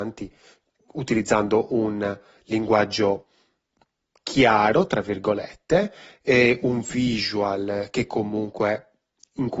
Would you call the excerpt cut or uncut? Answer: uncut